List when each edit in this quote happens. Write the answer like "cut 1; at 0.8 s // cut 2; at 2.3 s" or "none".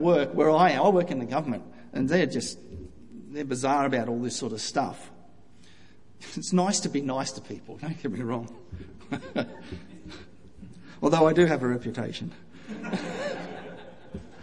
none